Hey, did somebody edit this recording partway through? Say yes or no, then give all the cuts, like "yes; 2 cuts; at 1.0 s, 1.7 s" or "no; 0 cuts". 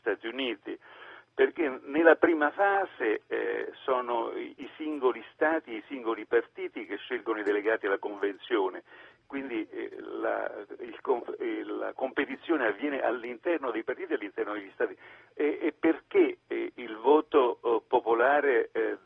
yes; 1 cut; at 15.3 s